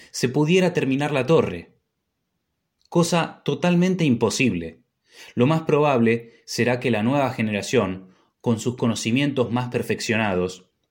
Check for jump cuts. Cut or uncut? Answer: uncut